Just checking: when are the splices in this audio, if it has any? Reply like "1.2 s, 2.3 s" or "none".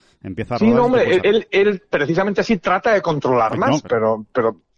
1.2 s, 3.8 s